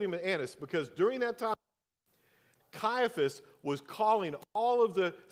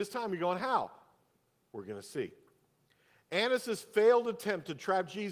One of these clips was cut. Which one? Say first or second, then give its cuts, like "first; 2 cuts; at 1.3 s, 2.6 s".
first; 1 cut; at 2.6 s